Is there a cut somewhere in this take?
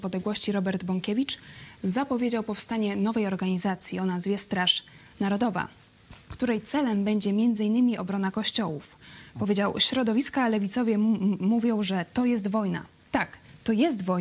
no; 0 cuts

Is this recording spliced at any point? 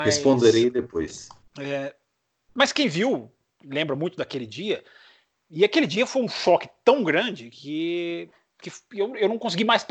yes; 1 cut; at 1.5 s

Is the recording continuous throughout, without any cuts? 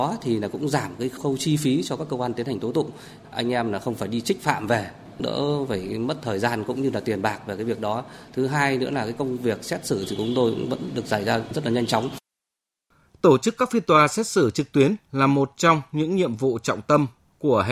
yes; 0 cuts

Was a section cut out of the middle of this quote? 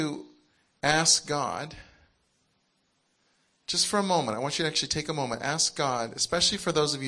no; 0 cuts

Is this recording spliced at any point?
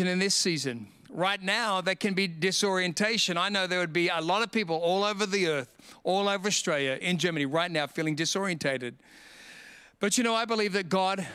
yes; 1 cut; at 7.0 s

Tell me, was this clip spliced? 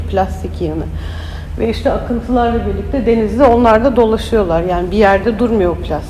no; 0 cuts

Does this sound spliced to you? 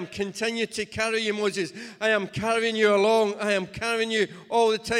no; 0 cuts

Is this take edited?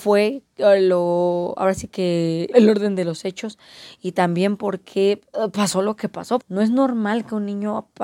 yes; 2 cuts; at 2.5 s, 6.4 s

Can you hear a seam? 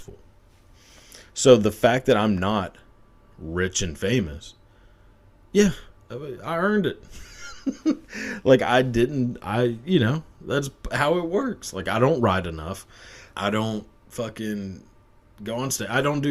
yes; 2 cuts; at 7.5 s, 13.3 s

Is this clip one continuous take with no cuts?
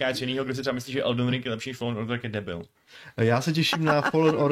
yes; 0 cuts

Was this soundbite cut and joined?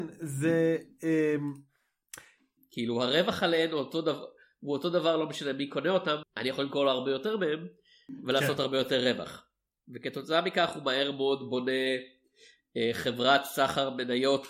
yes; 2 cuts; at 2.6 s, 6.2 s

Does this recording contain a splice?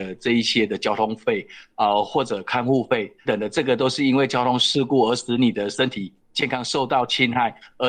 yes; 1 cut; at 3.3 s

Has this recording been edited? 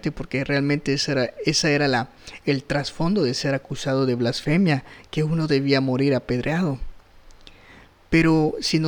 no; 0 cuts

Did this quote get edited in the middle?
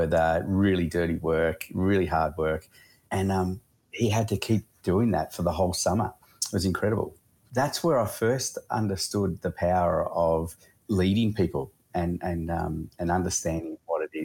no; 0 cuts

